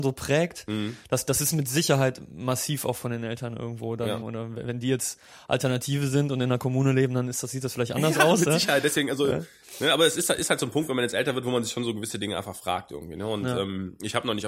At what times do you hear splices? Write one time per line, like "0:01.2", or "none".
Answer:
0:04.2